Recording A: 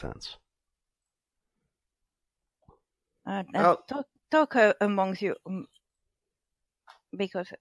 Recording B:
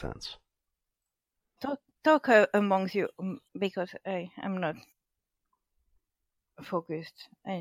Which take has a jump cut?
B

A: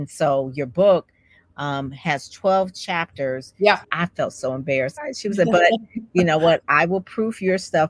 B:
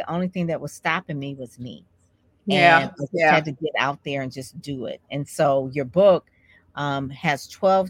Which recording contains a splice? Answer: A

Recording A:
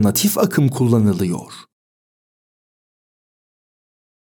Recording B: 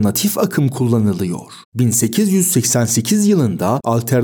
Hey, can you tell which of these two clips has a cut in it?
B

